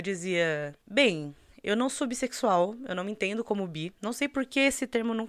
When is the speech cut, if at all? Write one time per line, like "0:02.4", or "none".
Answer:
none